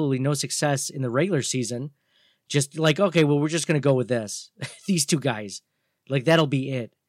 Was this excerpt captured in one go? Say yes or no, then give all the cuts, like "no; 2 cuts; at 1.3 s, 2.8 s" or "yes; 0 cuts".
yes; 0 cuts